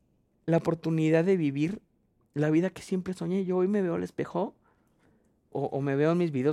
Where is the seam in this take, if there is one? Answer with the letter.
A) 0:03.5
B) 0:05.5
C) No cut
B